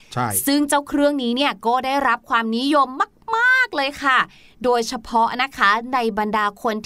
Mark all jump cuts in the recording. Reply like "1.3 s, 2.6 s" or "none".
none

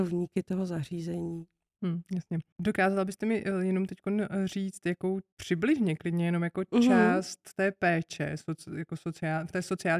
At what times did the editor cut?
none

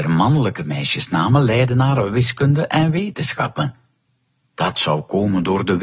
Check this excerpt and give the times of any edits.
4.5 s

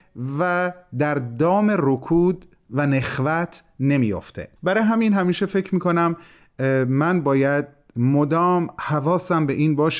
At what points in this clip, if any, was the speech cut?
4.6 s

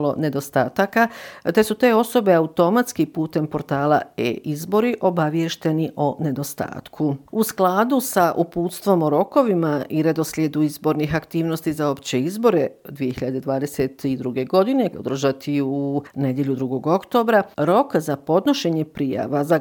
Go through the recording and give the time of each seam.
14.9 s

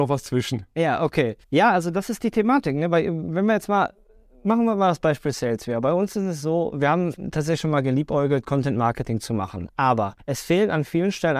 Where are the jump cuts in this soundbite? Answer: 1.4 s

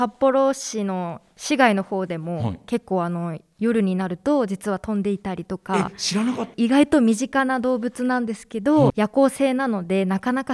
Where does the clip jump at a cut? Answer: 6.5 s, 8.9 s

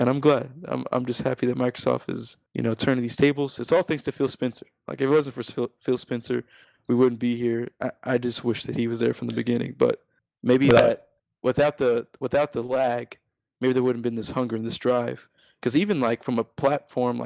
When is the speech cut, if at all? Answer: 2.5 s

